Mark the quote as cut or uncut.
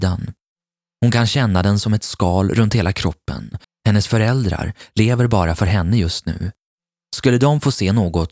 cut